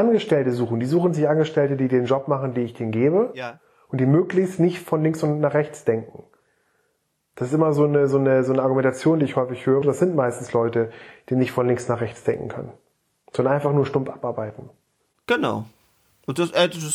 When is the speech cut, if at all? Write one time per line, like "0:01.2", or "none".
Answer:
0:09.8